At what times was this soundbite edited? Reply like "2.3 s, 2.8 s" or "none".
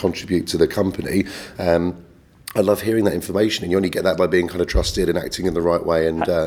none